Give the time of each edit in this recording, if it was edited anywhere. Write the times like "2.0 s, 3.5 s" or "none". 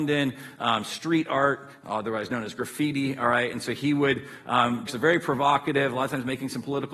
4.9 s